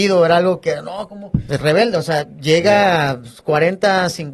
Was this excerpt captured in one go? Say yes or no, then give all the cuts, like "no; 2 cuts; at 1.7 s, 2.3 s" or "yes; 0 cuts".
no; 1 cut; at 1.5 s